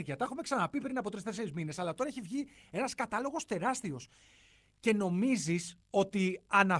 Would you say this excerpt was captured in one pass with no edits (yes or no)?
no